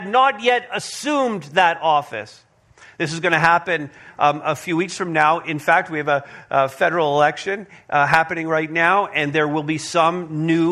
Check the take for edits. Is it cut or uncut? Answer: uncut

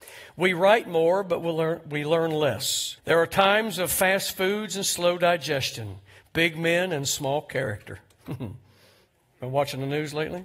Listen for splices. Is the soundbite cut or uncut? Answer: cut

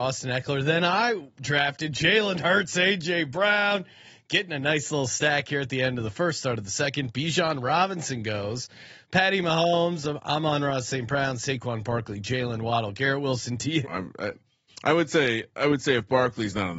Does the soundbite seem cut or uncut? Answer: cut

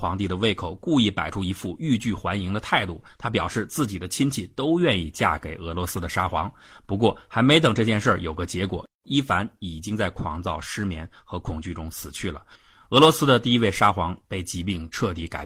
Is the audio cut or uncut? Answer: uncut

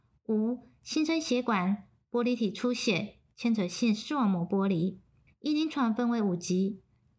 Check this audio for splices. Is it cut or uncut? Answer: cut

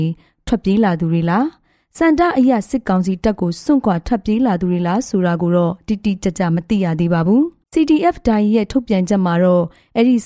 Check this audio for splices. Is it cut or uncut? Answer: cut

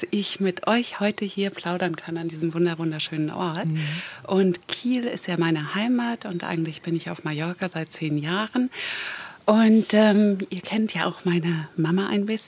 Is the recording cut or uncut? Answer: uncut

